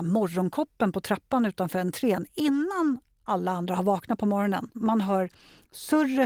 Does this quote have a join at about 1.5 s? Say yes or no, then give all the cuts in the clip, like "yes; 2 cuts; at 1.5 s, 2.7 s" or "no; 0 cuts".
no; 1 cut; at 4.7 s